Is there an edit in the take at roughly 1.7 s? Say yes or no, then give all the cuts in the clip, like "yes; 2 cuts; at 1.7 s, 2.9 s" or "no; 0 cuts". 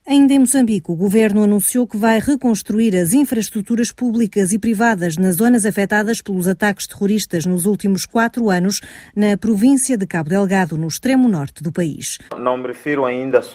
no; 1 cut; at 12.3 s